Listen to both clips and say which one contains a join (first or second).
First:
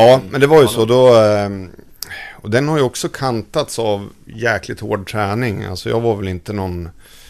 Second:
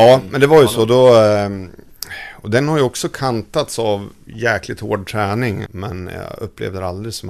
second